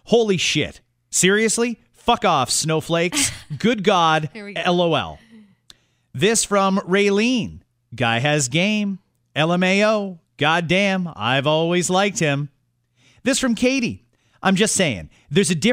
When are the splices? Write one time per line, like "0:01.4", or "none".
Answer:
none